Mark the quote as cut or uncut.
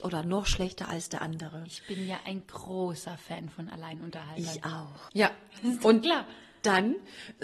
cut